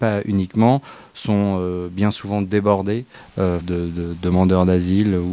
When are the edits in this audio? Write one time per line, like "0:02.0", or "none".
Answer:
0:03.6